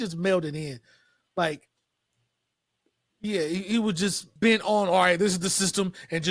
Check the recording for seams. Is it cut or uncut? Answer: cut